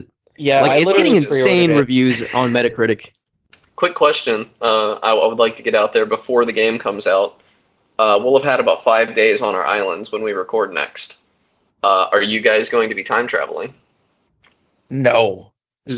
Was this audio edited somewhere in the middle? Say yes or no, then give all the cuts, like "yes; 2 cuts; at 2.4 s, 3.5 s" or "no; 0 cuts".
no; 0 cuts